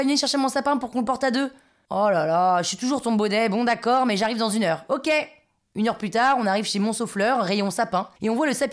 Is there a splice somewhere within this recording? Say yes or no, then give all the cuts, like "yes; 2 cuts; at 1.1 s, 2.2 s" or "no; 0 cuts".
no; 0 cuts